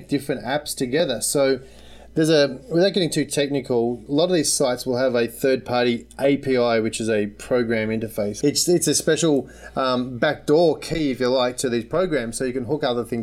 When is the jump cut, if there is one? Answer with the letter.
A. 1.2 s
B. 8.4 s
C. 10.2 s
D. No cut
B